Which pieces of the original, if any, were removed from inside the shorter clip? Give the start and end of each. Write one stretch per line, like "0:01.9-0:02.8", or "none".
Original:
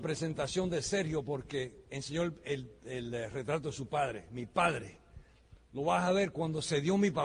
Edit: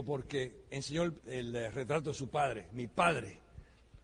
0:02.4-0:02.8